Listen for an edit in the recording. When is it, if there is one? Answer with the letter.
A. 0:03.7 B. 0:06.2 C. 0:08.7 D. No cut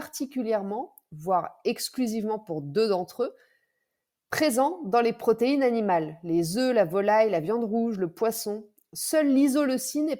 D